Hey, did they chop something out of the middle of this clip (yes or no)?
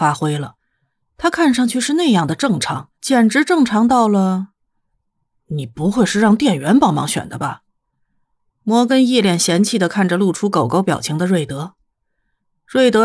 yes